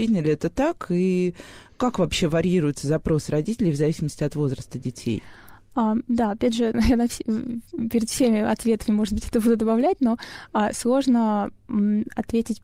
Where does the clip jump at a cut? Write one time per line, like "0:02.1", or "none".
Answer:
0:06.7